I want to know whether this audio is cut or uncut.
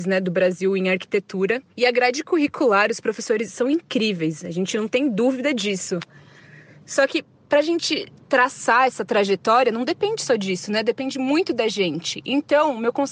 cut